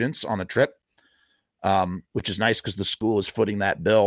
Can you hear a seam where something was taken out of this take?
no; 0 cuts

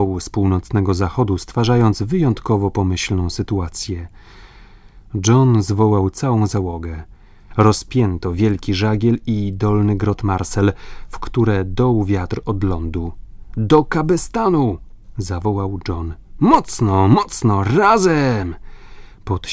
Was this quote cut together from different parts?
yes; 1 cut; at 7.5 s

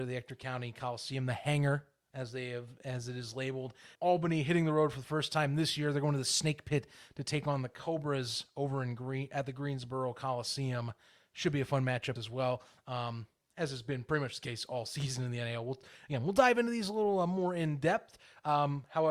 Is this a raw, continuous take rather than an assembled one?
no; 2 cuts; at 4.0 s, 12.2 s

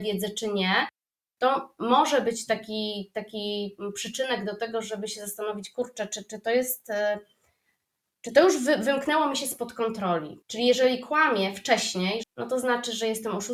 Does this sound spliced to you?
yes; 2 cuts; at 10.4 s, 12.2 s

